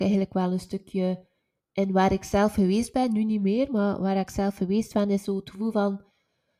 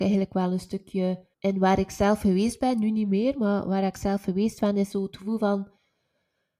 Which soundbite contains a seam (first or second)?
second